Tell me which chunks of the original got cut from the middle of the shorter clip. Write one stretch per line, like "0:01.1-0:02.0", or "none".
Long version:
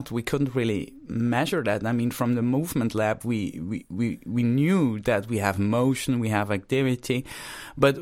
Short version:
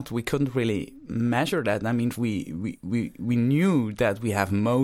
0:02.1-0:03.2

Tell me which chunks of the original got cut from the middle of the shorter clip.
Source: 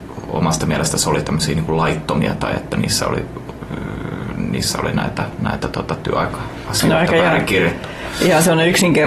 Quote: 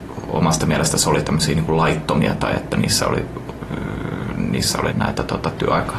0:04.9-0:05.4

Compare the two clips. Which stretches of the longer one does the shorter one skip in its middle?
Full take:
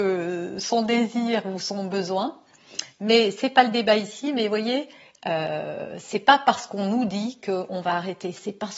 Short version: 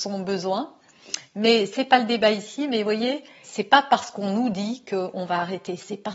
0:05.1-0:06.0

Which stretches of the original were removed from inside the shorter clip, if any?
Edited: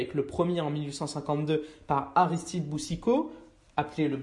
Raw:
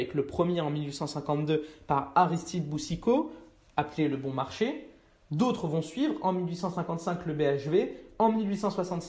none

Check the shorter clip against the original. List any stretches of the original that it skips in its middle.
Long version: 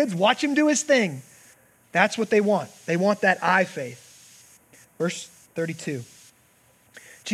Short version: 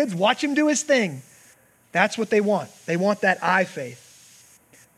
none

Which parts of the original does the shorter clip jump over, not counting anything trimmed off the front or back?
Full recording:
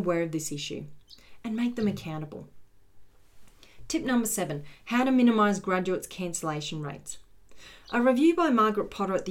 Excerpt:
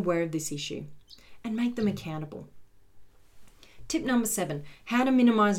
none

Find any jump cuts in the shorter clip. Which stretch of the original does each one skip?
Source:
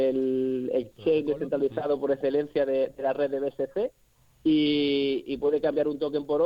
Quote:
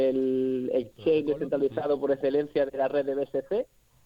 0:02.7-0:02.9

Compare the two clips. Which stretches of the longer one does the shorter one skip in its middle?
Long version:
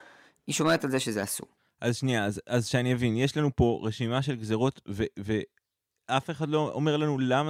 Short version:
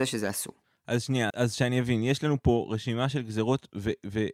0:02.2-0:02.4

